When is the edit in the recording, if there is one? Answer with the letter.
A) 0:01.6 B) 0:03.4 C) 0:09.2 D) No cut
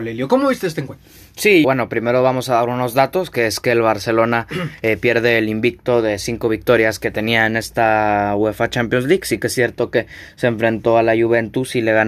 A